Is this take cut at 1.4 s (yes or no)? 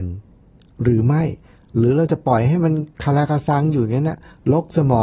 no